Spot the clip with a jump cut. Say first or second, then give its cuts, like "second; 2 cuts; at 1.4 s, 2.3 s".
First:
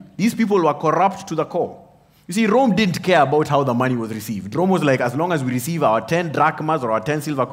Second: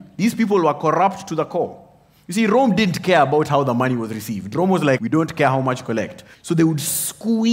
second; 2 cuts; at 5.0 s, 6.3 s